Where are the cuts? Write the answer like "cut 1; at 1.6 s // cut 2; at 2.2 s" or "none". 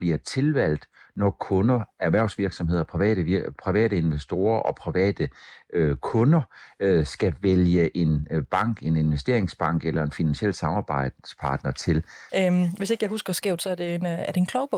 cut 1; at 12.3 s